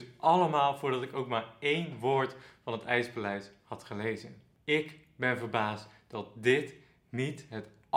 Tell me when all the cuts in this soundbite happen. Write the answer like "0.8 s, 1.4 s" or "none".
none